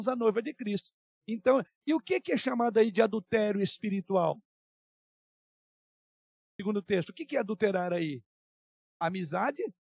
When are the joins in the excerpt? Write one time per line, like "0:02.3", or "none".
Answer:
none